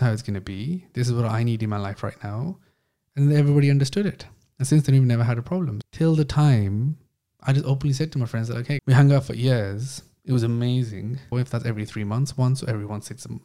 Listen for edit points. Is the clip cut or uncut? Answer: cut